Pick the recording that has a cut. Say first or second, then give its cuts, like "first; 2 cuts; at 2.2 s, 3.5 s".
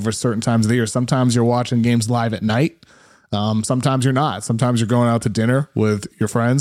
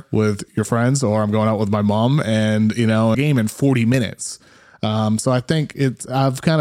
second; 1 cut; at 3.1 s